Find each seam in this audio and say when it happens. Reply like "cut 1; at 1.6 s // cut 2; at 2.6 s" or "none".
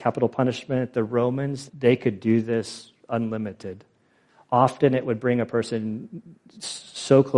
cut 1; at 1.7 s